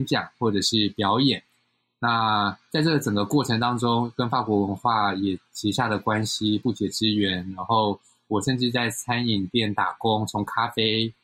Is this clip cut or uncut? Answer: uncut